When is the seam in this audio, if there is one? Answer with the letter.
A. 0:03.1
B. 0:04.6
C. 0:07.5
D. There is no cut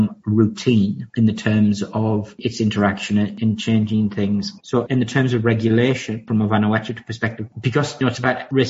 B